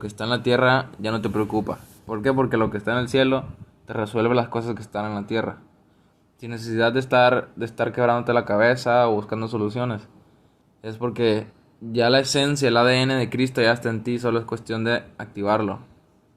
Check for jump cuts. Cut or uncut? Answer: uncut